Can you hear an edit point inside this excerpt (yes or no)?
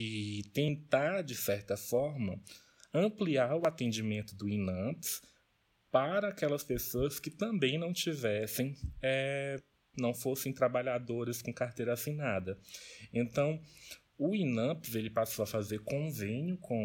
yes